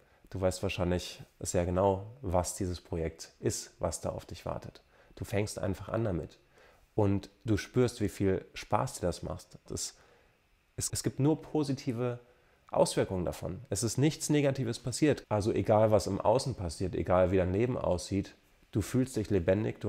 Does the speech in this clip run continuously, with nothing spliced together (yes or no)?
no